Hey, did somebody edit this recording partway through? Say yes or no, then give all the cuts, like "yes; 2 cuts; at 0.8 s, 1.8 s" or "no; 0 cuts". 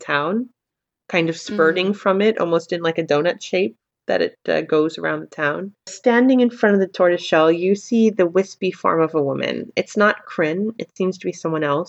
no; 0 cuts